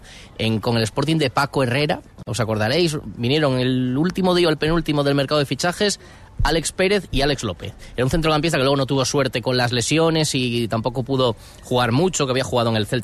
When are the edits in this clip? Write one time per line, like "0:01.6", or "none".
none